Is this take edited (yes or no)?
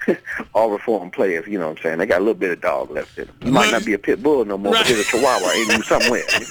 no